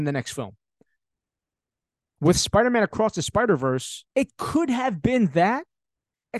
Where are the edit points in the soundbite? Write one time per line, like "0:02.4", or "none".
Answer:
0:04.1